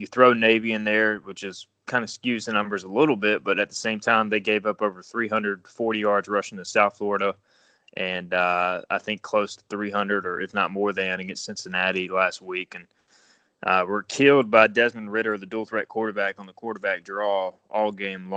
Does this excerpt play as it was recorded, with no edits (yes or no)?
yes